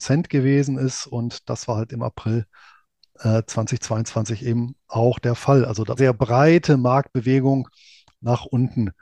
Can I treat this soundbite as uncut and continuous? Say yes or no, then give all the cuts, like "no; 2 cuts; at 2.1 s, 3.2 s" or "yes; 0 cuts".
no; 1 cut; at 6.0 s